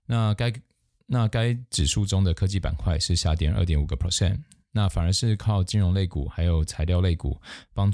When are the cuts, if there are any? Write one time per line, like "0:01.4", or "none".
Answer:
none